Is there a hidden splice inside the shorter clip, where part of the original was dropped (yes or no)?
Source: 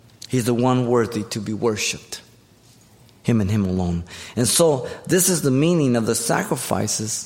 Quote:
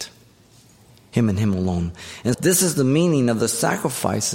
yes